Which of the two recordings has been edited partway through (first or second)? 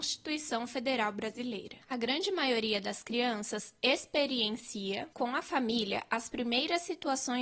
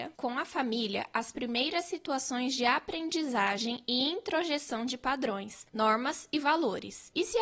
first